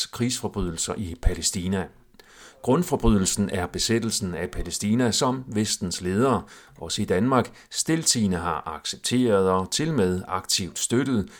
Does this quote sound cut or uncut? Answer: uncut